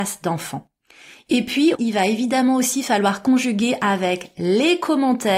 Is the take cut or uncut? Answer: cut